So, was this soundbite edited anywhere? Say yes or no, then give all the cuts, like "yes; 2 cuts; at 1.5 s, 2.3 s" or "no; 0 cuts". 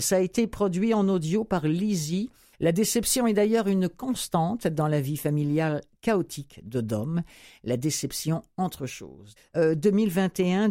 yes; 2 cuts; at 2.5 s, 9.4 s